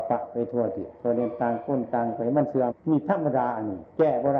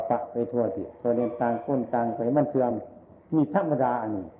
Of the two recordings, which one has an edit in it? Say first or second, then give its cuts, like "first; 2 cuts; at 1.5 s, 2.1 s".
first; 1 cut; at 2.7 s